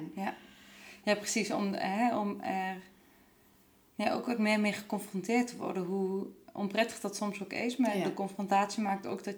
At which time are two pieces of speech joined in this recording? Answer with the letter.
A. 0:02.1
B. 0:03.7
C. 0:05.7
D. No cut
D